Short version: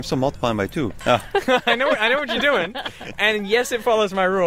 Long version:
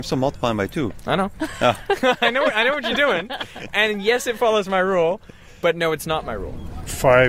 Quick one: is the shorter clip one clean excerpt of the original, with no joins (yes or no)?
no